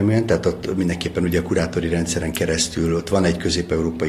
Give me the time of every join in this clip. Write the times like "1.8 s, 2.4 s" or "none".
none